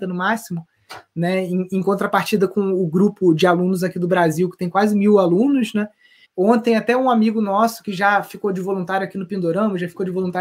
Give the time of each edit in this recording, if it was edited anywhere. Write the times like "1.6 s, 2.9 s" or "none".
6.2 s

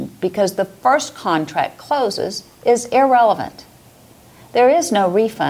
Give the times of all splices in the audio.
none

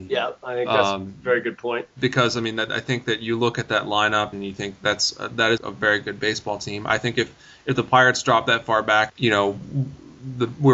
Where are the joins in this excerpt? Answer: 4.3 s, 5.6 s, 9.1 s

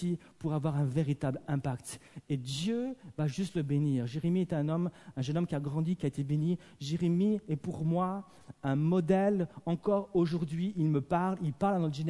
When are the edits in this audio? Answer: none

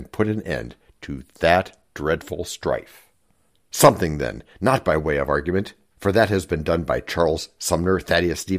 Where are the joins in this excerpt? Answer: none

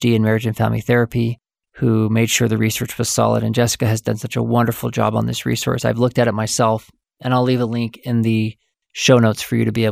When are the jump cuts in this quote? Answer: none

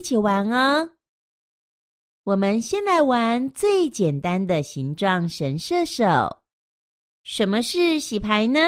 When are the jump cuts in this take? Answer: 2.0 s, 7.0 s

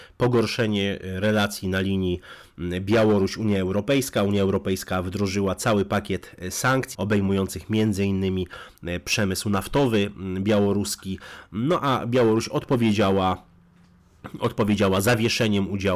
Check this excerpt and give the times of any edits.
6.9 s

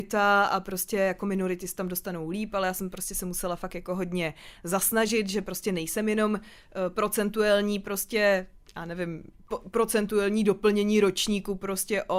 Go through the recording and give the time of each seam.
none

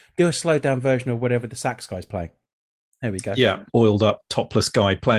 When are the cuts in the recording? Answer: 3.7 s

